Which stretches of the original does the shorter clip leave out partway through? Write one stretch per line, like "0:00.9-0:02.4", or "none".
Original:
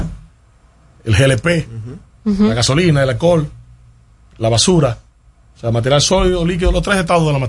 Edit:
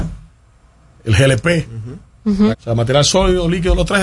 0:02.5-0:05.5

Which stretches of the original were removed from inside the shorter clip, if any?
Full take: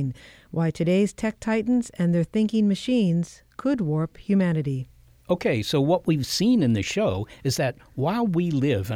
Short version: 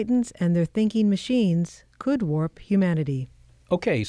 none

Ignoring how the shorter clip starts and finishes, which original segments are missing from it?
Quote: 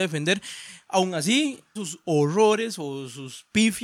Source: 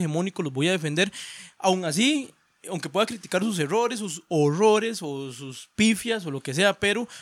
0:02.5-0:04.0

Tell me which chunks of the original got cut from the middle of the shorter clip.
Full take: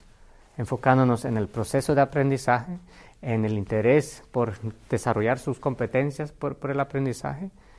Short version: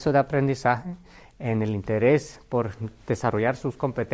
none

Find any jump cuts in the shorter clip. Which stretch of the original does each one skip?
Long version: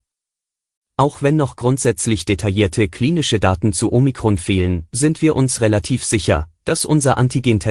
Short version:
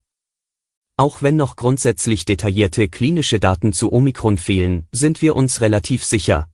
none

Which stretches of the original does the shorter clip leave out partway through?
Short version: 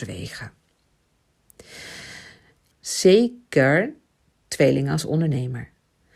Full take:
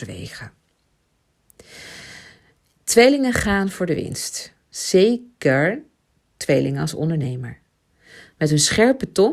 0:02.7-0:04.6

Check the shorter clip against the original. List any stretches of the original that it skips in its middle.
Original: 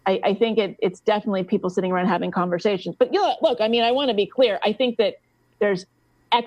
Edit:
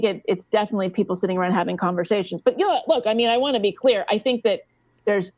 none

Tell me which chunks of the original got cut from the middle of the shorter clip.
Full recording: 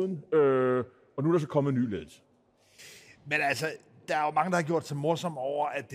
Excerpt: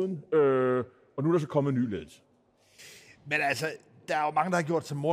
none

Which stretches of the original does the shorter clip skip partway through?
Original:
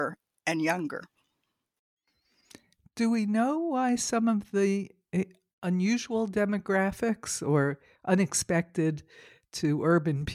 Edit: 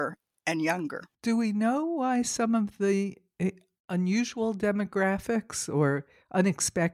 0:01.1-0:02.9

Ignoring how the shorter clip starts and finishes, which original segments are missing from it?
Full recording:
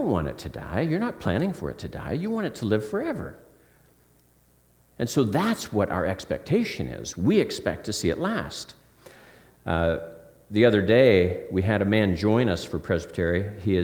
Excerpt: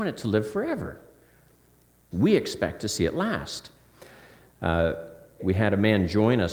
0:04.5-0:07.2
0:10.4-0:11.5

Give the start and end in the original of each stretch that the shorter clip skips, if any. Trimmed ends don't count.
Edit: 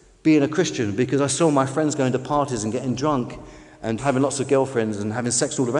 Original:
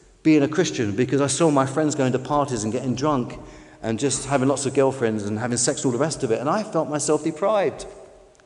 0:04.0-0:04.2

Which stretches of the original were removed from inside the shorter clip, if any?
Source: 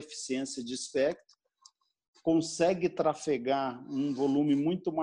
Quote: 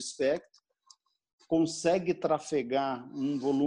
none

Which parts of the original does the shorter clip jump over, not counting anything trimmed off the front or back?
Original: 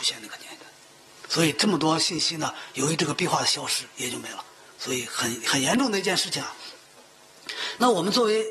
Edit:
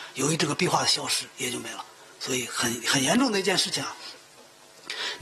none

